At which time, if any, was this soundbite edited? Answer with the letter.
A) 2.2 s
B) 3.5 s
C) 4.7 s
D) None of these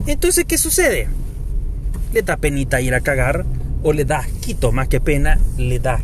D